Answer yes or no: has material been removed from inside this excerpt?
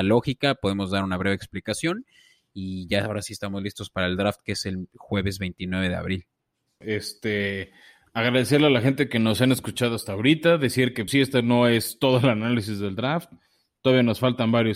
yes